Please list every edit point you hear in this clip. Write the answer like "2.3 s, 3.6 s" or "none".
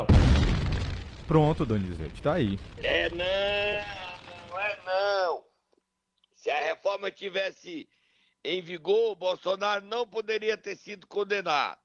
none